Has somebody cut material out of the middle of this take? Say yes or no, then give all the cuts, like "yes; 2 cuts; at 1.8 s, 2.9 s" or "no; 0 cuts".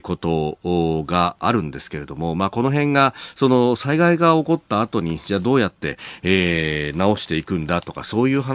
no; 0 cuts